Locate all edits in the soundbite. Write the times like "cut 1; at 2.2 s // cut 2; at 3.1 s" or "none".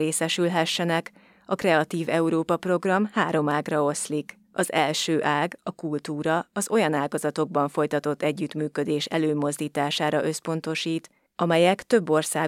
cut 1; at 4.4 s